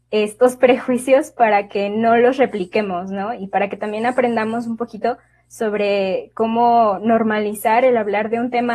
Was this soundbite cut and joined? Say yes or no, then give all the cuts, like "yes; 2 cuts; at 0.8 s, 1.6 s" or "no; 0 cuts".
no; 0 cuts